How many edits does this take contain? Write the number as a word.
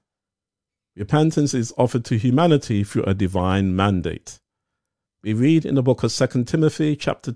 one